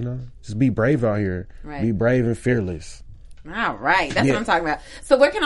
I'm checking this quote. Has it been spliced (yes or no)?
no